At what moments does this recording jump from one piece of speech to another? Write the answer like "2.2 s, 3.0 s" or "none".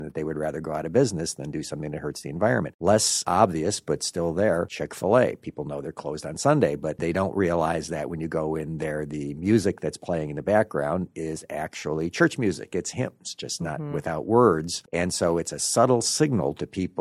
none